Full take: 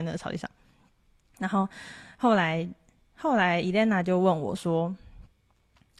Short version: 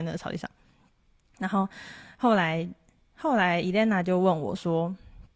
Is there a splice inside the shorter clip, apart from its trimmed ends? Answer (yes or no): no